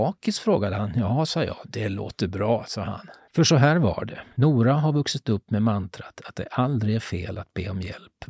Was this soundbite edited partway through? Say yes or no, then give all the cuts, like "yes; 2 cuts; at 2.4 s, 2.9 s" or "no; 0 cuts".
no; 0 cuts